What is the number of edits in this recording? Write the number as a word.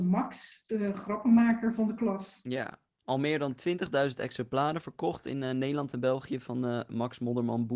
zero